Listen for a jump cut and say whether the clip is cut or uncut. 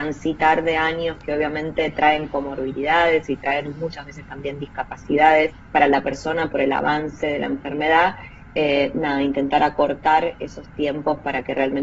uncut